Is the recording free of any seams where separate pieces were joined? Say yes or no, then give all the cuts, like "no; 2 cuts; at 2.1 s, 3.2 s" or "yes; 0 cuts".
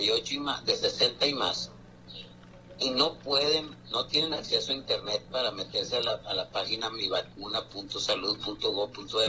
yes; 0 cuts